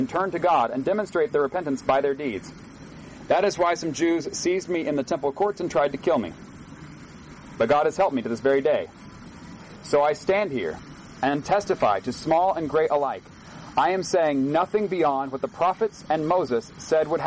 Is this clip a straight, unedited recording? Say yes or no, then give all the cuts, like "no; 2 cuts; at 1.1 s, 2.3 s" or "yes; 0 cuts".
yes; 0 cuts